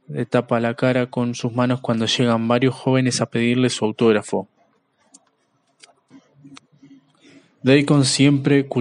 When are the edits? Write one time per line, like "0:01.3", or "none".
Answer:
none